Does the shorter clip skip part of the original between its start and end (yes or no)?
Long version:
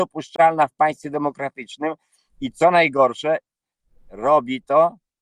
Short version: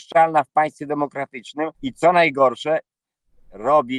yes